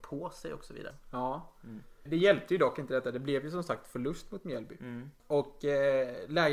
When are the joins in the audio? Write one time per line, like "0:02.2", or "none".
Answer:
none